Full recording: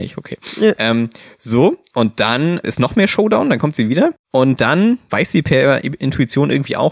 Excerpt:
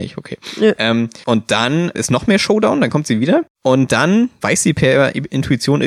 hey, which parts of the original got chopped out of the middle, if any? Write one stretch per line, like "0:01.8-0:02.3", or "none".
0:01.2-0:01.9